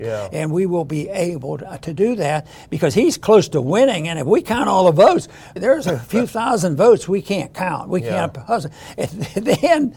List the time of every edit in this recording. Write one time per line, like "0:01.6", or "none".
0:05.6